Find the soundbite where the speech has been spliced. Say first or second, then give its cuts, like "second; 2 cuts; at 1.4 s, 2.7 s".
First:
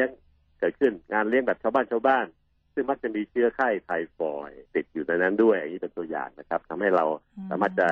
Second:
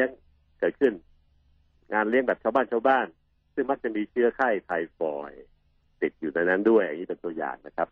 first; 2 cuts; at 1.0 s, 4.7 s